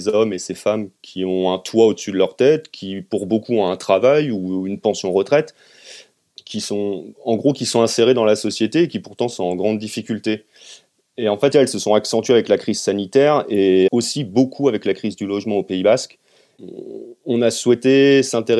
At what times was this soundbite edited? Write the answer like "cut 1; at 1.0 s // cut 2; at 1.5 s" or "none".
cut 1; at 11.5 s // cut 2; at 13.9 s

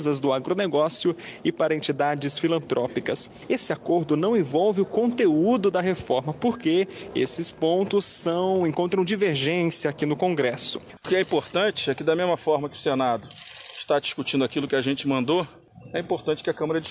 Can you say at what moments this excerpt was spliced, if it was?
cut 1; at 11.0 s

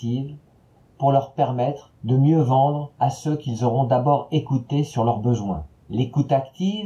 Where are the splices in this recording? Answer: cut 1; at 5.8 s

